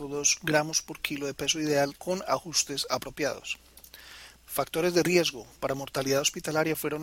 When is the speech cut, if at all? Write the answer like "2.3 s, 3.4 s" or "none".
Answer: 1.9 s, 4.3 s

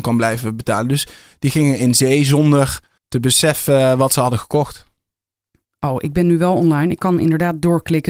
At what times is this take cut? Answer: none

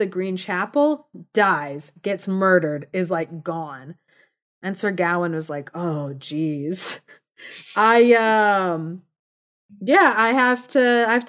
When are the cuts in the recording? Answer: none

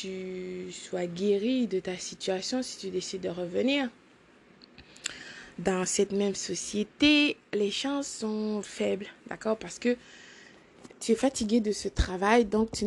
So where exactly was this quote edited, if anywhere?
8.6 s

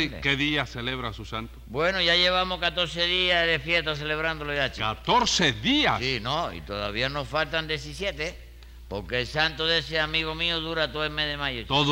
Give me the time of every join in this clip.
none

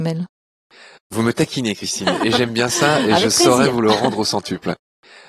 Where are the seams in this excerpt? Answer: 2.2 s

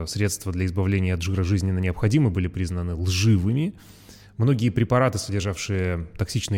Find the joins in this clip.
none

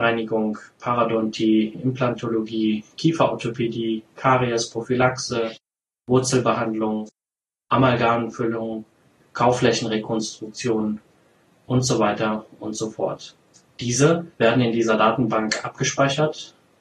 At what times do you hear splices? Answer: 14.3 s

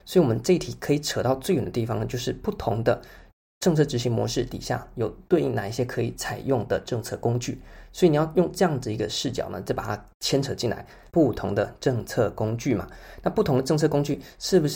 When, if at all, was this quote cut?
11.1 s

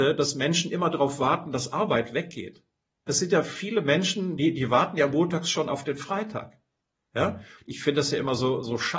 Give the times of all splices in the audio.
3.1 s, 7.6 s

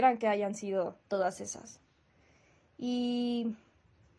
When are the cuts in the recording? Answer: none

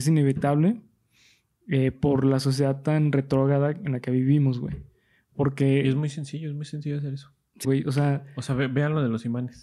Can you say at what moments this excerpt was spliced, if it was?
7.6 s

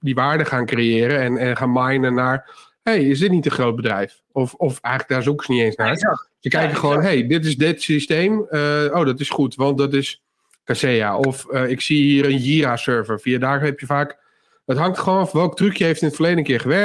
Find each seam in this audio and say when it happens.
none

